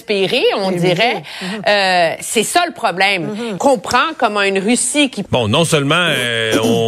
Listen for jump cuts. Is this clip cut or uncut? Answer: cut